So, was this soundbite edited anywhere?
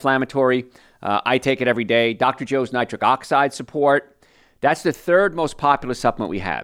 no; 0 cuts

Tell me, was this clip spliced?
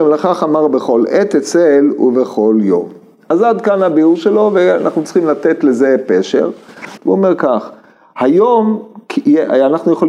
yes; 1 cut; at 7.0 s

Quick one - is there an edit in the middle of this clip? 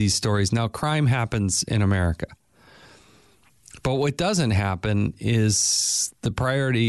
no; 0 cuts

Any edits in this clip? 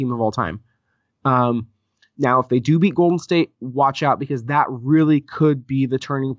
no; 0 cuts

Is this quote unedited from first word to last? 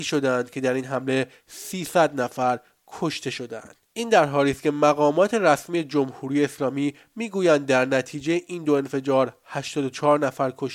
no; 1 cut; at 3.8 s

